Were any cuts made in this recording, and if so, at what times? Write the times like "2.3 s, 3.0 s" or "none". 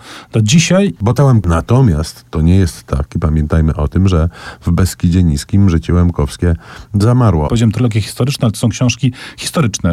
1.4 s, 7.5 s

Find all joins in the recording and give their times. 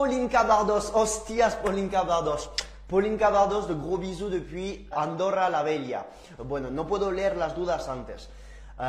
4.9 s, 6.4 s

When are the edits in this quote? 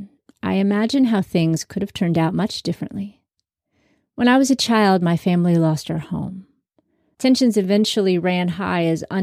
7.1 s

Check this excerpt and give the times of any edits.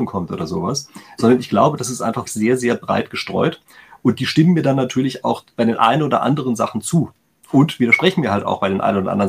2.3 s

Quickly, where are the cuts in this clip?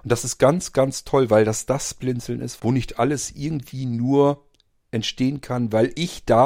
2.6 s

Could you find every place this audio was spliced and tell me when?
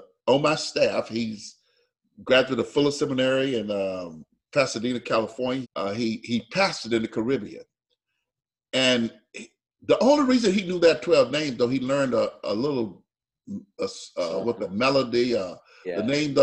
5.6 s

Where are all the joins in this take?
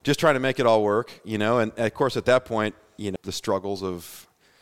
3.2 s

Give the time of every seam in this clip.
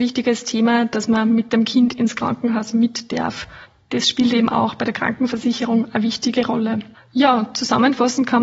none

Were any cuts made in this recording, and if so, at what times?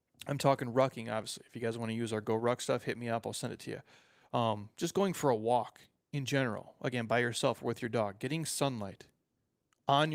none

